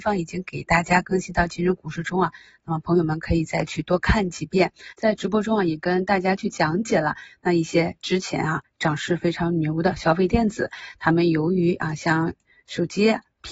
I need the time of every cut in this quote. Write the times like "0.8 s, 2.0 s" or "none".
none